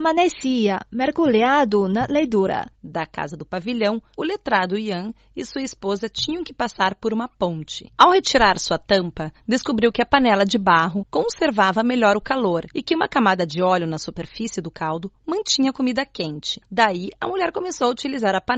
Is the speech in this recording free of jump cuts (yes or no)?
no